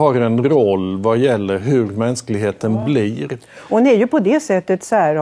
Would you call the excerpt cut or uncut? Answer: uncut